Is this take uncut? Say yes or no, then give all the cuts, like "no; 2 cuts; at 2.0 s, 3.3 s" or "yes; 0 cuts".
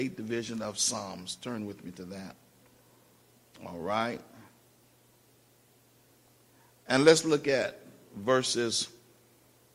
yes; 0 cuts